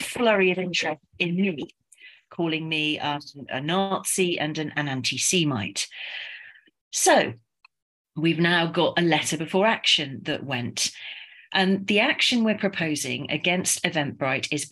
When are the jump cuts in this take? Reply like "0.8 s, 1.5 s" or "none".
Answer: none